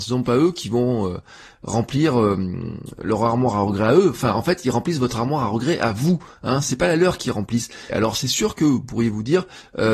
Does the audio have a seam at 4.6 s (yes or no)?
no